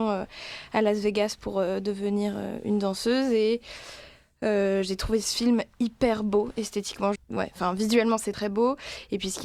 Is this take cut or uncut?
cut